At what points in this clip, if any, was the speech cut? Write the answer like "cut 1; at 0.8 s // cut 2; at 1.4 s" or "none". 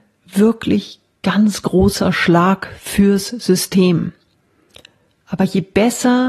none